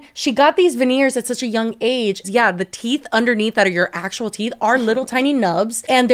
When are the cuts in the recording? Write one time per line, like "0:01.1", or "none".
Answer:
0:02.2